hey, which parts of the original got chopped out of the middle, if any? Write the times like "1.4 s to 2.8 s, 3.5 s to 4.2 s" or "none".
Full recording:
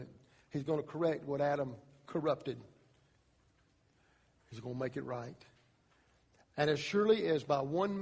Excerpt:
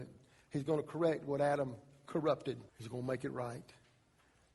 2.7 s to 4.4 s